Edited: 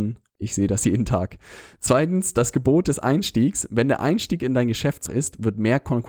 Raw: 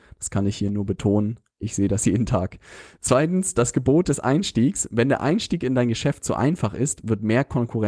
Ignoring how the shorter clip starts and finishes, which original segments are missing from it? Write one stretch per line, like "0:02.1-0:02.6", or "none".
0:06.3-0:06.7